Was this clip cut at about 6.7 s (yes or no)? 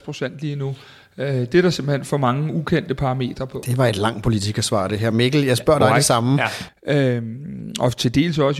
yes